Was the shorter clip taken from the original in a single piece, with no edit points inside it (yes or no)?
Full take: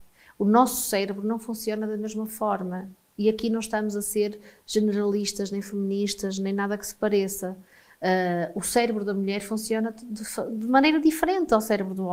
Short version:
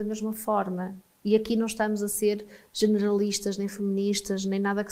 yes